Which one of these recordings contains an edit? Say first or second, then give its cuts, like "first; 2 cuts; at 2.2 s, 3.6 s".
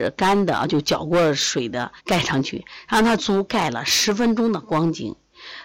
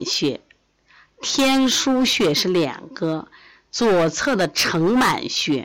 first; 2 cuts; at 2.0 s, 3.2 s